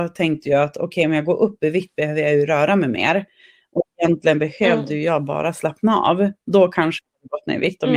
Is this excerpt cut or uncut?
uncut